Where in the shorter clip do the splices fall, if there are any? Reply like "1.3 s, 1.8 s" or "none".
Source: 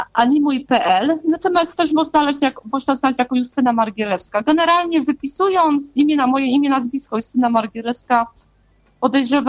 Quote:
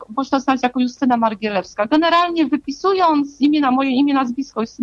none